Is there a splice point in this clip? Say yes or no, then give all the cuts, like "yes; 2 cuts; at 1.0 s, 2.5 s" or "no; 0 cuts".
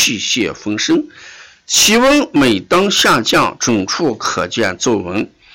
no; 0 cuts